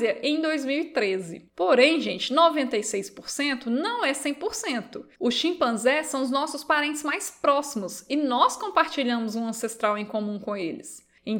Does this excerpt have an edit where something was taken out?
yes; 2 cuts; at 1.5 s, 5.1 s

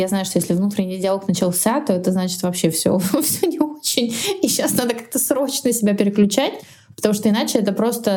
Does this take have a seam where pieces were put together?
no; 0 cuts

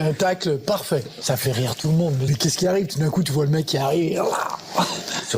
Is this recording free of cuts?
no; 1 cut; at 2.3 s

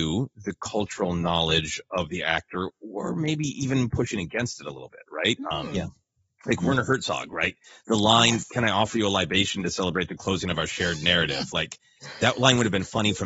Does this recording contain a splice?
no; 0 cuts

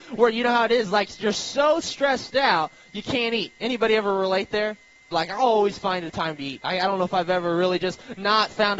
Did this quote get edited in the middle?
yes; 1 cut; at 5.1 s

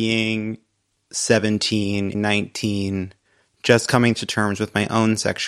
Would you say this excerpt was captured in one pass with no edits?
no; 1 cut; at 2.1 s

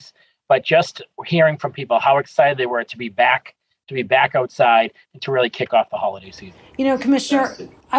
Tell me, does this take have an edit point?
no; 0 cuts

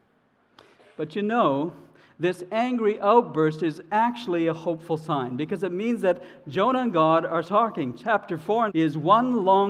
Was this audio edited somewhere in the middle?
yes; 2 cuts; at 7.4 s, 8.7 s

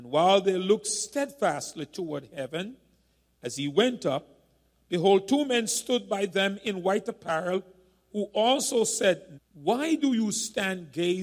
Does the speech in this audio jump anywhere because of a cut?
yes; 1 cut; at 9.4 s

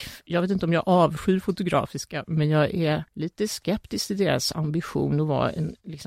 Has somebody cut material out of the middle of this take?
yes; 1 cut; at 3.1 s

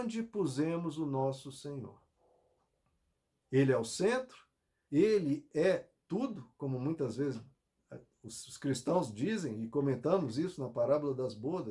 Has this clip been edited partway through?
yes; 1 cut; at 4.9 s

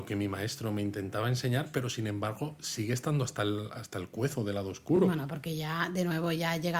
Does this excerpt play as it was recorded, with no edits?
yes; 0 cuts

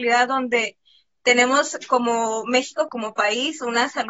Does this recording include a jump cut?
yes; 1 cut; at 2.9 s

